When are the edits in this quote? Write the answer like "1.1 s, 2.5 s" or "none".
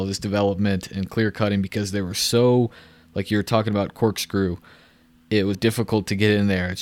5.5 s